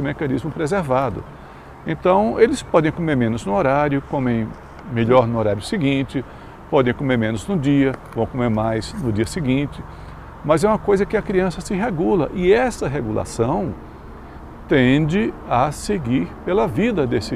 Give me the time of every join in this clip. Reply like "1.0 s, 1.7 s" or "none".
none